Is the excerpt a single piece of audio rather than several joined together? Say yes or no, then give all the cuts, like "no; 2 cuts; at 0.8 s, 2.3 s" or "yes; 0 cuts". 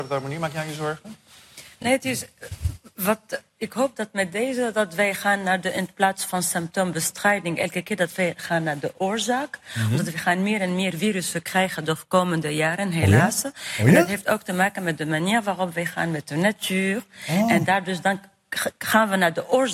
yes; 0 cuts